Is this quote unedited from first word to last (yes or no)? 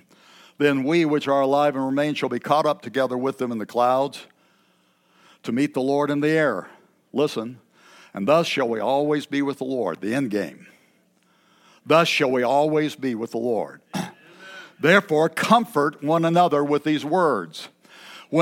yes